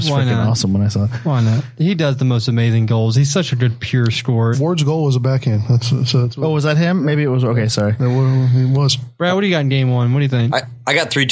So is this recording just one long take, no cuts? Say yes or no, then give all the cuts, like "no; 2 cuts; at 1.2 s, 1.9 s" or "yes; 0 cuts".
no; 1 cut; at 4.5 s